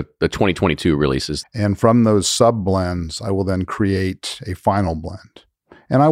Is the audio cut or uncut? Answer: cut